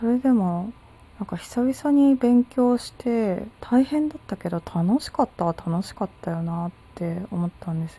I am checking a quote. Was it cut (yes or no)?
yes